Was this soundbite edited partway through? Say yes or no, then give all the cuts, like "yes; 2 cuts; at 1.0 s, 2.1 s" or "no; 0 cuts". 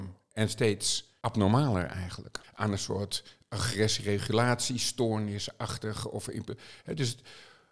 yes; 1 cut; at 2.4 s